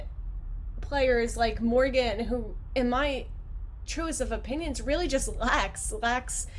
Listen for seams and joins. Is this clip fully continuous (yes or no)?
yes